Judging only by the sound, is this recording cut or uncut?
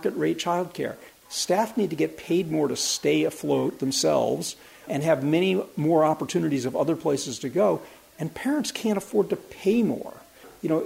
cut